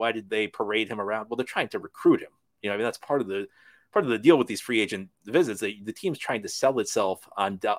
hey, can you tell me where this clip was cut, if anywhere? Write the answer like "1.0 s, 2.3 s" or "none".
none